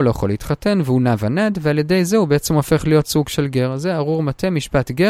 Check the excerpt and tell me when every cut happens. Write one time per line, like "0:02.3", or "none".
none